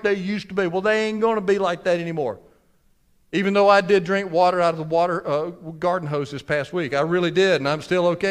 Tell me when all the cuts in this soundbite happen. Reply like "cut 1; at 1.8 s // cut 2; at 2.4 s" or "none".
none